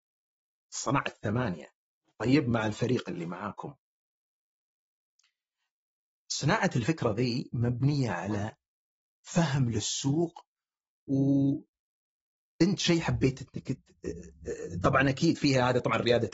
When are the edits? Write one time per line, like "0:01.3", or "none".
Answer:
0:11.1